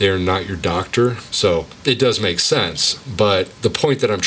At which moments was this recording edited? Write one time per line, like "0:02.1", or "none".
0:01.3